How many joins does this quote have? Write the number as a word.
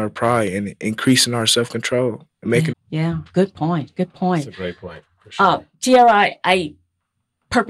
one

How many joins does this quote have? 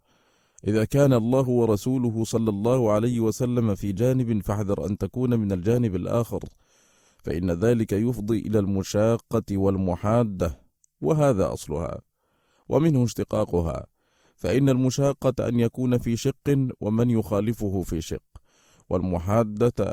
zero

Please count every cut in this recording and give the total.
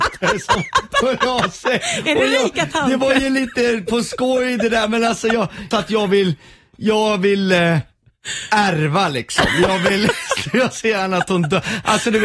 one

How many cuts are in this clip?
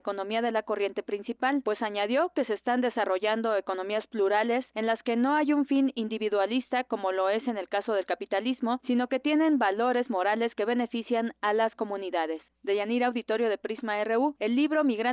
zero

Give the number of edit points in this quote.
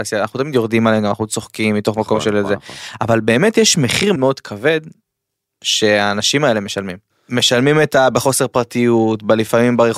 two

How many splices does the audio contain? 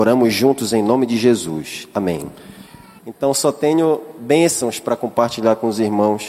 one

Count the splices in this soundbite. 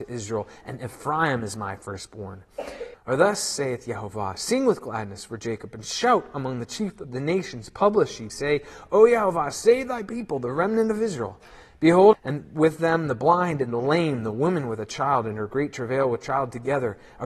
three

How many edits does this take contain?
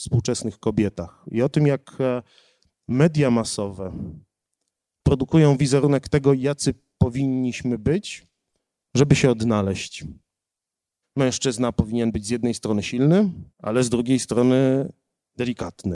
two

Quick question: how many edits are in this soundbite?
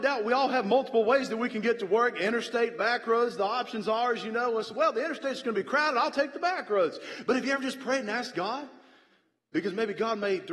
zero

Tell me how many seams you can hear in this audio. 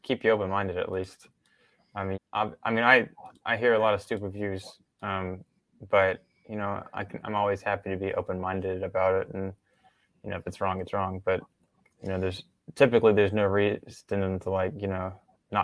one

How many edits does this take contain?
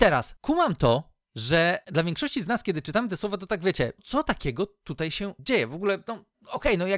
one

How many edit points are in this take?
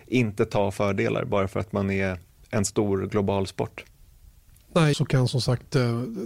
one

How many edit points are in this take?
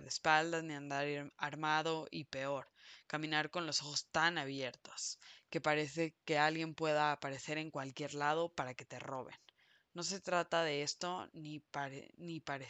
zero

